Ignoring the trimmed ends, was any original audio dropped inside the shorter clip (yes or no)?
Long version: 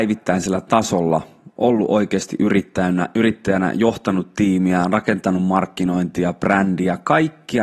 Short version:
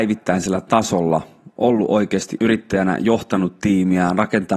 yes